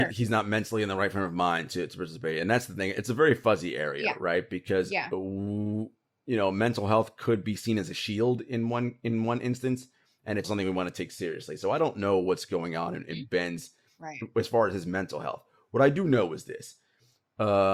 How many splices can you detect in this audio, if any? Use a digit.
1